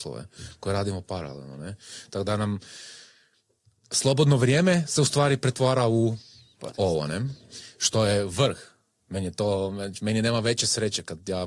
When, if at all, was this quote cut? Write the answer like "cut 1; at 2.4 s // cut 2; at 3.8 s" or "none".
none